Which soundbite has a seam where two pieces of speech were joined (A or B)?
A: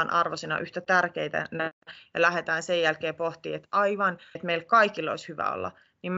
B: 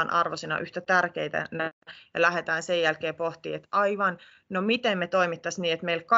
A